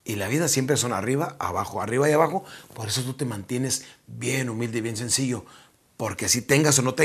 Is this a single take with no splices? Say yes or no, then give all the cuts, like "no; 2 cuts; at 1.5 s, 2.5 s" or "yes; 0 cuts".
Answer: yes; 0 cuts